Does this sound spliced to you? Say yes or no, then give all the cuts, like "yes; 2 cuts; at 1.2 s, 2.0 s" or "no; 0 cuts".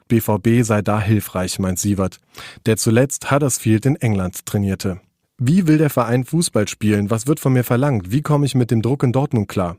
no; 0 cuts